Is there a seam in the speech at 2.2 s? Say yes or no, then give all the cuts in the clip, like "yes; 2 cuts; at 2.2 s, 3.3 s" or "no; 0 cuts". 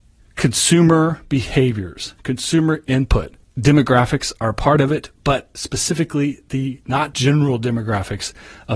no; 2 cuts; at 3.4 s, 7.1 s